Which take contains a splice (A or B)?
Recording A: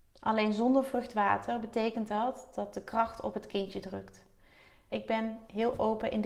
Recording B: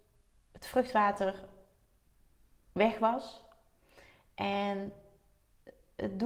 A